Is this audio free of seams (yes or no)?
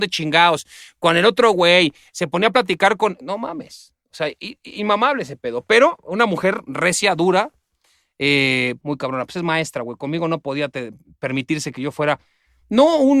no